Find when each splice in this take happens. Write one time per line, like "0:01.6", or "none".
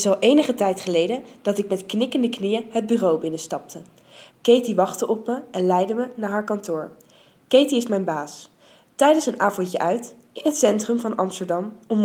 0:04.3